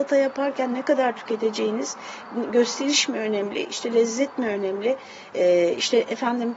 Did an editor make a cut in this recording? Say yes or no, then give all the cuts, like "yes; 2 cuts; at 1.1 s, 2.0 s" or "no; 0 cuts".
no; 0 cuts